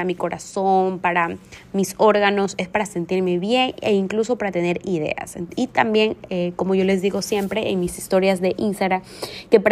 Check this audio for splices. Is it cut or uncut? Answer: uncut